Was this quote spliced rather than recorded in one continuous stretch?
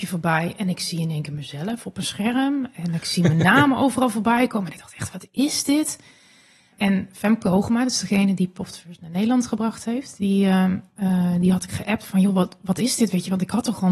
no; 0 cuts

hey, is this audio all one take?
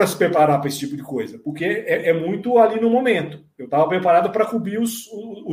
yes; 0 cuts

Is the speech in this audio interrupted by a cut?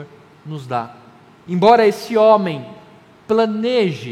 yes; 1 cut; at 1.5 s

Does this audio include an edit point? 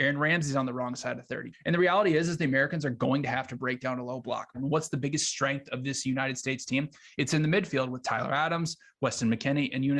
yes; 2 cuts; at 1.5 s, 4.5 s

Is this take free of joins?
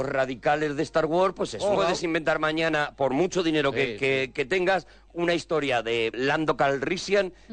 no; 3 cuts; at 1.8 s, 5.1 s, 6.1 s

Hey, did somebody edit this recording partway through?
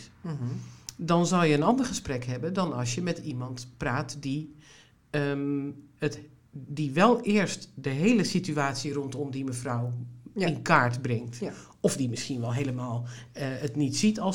no; 0 cuts

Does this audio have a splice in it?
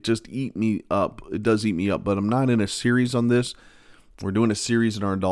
no; 0 cuts

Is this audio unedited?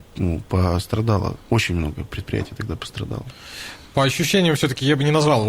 yes; 0 cuts

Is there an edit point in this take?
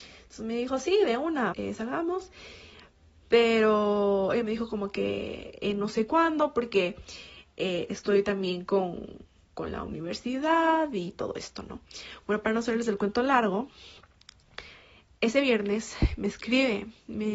yes; 1 cut; at 1.5 s

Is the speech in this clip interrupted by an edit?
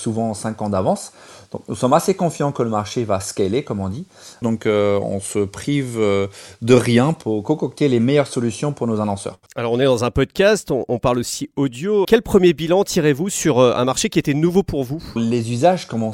yes; 3 cuts; at 4.4 s, 12.0 s, 15.2 s

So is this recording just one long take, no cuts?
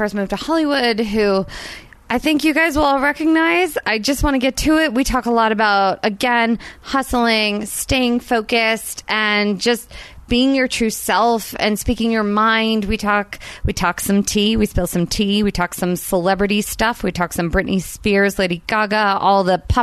yes; 0 cuts

